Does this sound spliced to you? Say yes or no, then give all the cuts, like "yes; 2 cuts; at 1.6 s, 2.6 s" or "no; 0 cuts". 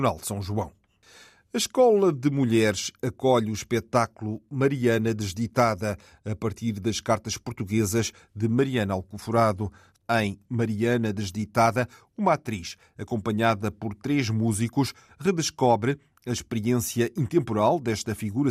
no; 0 cuts